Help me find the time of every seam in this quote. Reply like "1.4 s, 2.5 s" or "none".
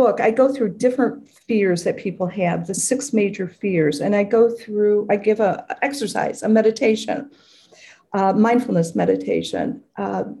none